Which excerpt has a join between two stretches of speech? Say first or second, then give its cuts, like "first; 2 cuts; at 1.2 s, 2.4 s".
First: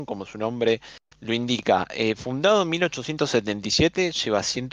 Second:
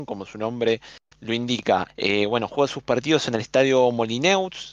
second; 1 cut; at 1.9 s